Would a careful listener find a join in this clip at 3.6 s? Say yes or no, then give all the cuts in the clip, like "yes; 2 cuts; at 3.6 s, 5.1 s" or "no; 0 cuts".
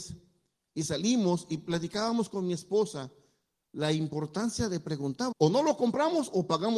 no; 1 cut; at 5.3 s